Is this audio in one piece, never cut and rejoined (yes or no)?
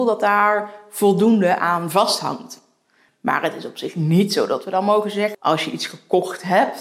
no